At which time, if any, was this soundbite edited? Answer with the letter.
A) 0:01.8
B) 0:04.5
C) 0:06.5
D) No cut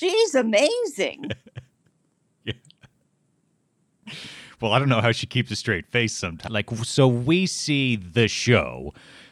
C